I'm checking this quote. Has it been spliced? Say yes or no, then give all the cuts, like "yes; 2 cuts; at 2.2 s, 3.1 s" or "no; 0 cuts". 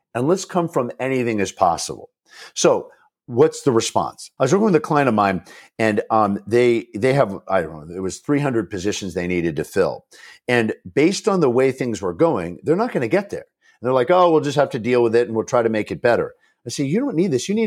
yes; 1 cut; at 4.4 s